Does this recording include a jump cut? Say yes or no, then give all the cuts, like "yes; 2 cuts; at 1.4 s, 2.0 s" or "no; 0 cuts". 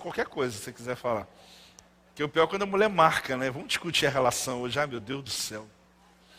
no; 0 cuts